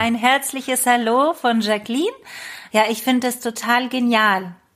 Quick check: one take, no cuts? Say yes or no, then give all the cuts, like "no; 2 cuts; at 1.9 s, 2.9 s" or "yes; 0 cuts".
no; 1 cut; at 2.7 s